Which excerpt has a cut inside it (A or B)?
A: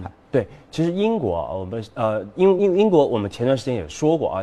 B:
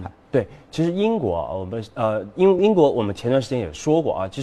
B